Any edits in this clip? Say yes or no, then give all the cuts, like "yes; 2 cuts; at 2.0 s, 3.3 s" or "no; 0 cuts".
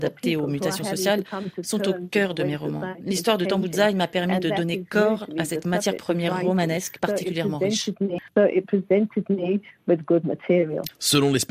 no; 0 cuts